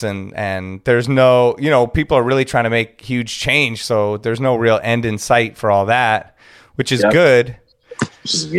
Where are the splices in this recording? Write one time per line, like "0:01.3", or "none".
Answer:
none